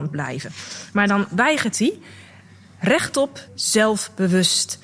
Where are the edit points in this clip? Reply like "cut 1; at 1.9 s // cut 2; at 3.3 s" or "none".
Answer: cut 1; at 3.5 s